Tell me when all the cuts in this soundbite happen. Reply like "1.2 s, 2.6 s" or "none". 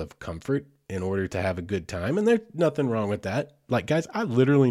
none